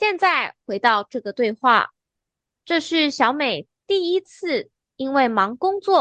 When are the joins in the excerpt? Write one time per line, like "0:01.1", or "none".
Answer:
none